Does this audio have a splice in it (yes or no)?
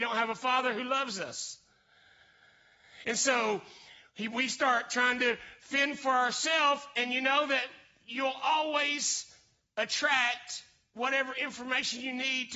no